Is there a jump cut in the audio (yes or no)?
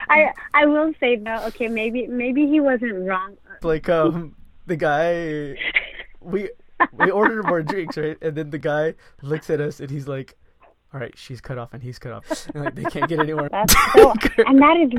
yes